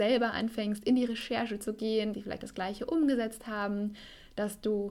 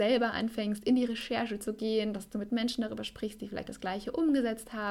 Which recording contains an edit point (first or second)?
first